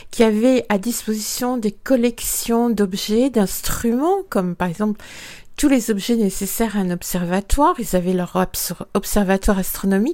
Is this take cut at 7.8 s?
no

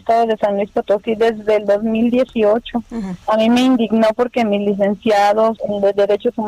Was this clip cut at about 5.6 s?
yes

